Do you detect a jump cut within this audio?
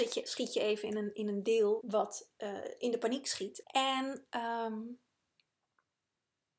yes; 2 cuts; at 1.8 s, 3.6 s

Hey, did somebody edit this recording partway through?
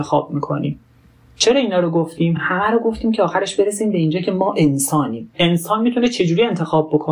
no; 0 cuts

